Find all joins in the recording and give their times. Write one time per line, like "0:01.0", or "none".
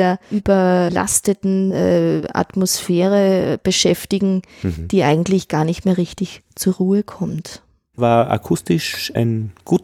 0:07.9